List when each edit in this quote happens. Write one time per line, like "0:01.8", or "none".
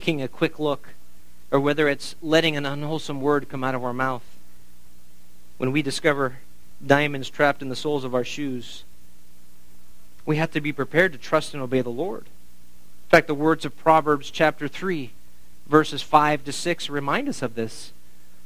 none